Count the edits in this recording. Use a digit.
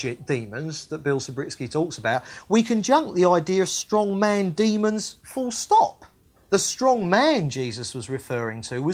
1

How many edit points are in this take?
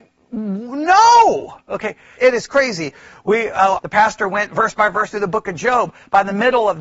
2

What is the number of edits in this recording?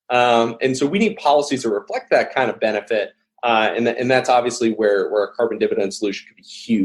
0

